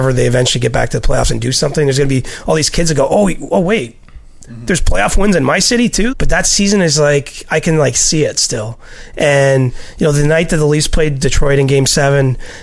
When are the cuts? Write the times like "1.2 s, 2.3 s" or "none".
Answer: 6.1 s